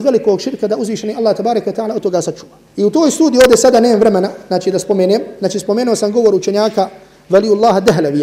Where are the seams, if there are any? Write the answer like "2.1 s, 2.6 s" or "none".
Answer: 2.7 s